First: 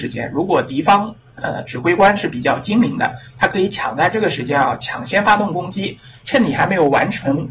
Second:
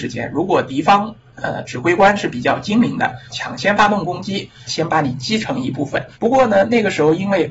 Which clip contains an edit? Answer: second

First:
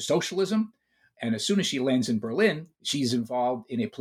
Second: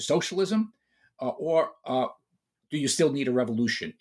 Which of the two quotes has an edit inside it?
first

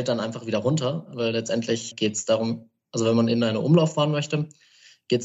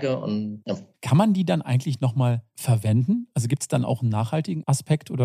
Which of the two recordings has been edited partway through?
second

